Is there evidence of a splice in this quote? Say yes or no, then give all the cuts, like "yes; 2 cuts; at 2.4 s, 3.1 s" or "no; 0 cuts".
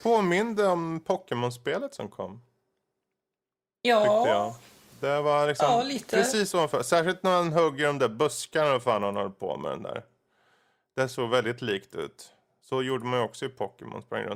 no; 0 cuts